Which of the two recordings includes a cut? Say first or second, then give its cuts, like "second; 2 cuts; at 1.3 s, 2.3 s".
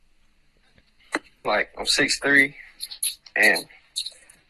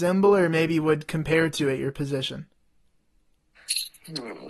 first; 1 cut; at 1.4 s